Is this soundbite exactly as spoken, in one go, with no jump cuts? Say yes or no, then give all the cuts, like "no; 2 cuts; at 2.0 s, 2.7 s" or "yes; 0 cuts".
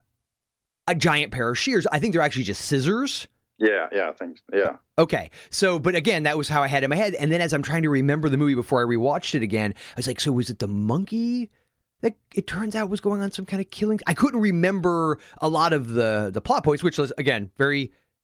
yes; 0 cuts